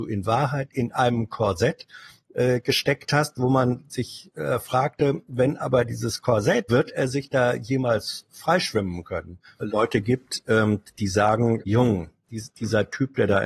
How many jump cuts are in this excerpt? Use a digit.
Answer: 3